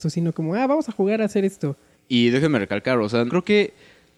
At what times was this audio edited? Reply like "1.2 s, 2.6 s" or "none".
1.9 s, 3.3 s

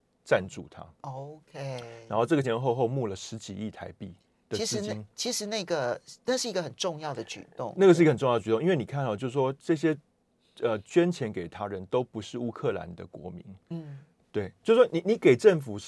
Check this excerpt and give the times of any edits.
2.4 s, 14.2 s

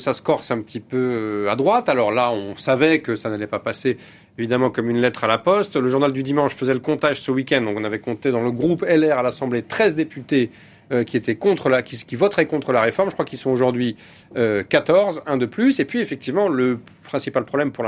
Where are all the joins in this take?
none

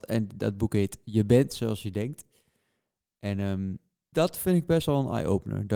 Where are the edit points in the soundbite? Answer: 4.1 s

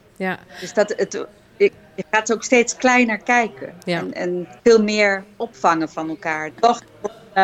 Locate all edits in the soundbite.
4.6 s, 6.5 s

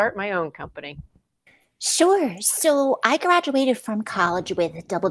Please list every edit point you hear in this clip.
none

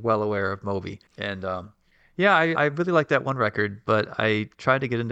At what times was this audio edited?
1.1 s, 2.6 s

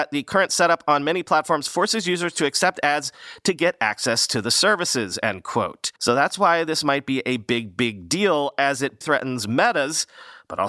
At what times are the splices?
6.0 s, 9.0 s

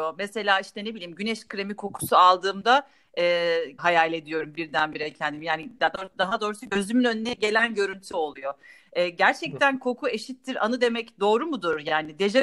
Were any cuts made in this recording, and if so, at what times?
3.8 s

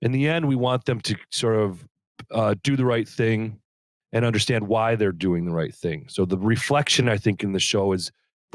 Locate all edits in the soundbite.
none

